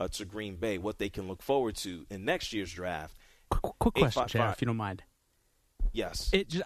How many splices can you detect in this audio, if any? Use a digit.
1